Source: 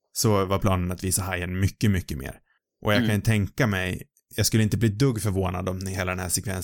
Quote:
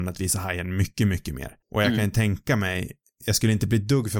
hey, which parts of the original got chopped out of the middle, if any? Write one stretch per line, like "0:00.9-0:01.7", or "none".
0:02.5-0:02.7